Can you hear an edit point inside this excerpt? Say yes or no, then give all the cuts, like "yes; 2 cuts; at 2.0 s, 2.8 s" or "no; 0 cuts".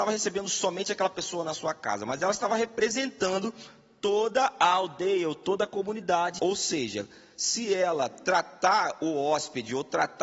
yes; 1 cut; at 6.4 s